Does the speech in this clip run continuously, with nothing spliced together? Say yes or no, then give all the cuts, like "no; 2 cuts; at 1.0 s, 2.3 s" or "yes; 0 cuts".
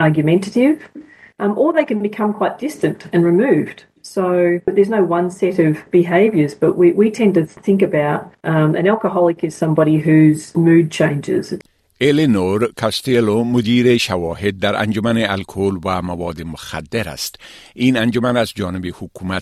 yes; 0 cuts